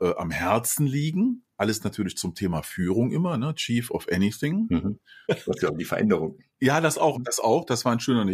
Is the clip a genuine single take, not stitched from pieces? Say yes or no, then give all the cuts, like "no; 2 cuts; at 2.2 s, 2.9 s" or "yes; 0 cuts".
no; 2 cuts; at 5.2 s, 7.1 s